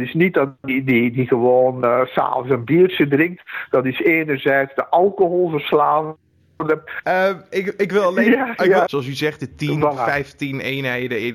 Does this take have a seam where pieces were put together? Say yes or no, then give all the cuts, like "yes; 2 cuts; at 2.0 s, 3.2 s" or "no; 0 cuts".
yes; 2 cuts; at 7.0 s, 8.9 s